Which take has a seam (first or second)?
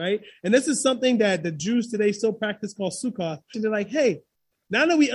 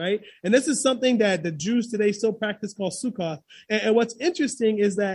first